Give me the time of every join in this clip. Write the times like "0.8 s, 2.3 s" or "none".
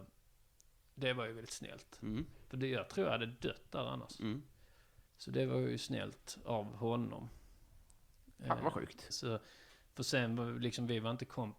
5.1 s, 9.1 s